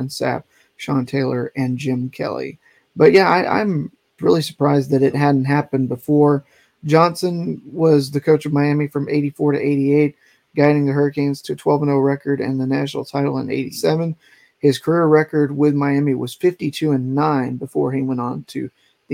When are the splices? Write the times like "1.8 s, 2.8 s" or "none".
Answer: 4.2 s